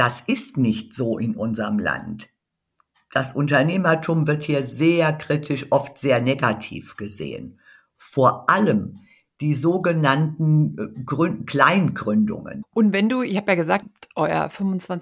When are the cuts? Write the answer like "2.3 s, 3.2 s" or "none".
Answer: 12.6 s, 13.8 s